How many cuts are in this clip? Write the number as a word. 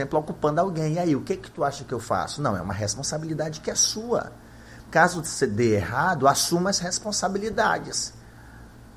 one